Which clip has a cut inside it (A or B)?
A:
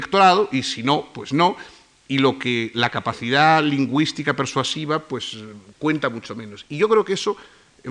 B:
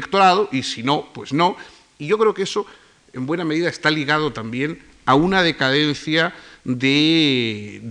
B